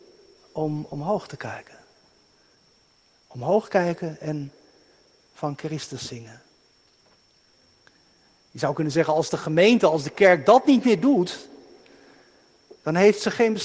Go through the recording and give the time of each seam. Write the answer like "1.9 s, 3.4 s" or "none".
none